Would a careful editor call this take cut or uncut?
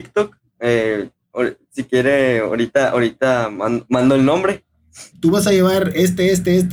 cut